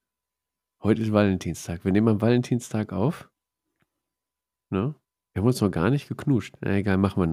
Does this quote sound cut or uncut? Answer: uncut